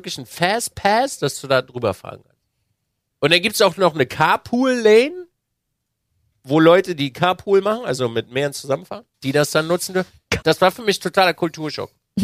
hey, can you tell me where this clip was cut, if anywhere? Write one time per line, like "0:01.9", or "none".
0:09.1
0:10.4